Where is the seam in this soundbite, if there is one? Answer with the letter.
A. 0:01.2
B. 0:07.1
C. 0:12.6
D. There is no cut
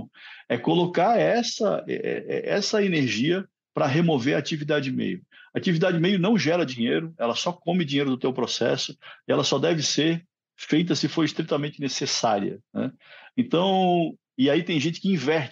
D